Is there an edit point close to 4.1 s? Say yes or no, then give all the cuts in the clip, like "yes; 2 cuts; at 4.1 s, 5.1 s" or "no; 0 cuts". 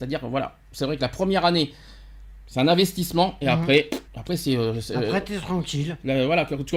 yes; 1 cut; at 4.1 s